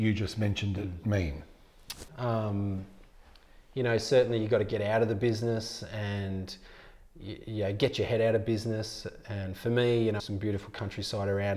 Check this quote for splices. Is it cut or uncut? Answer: cut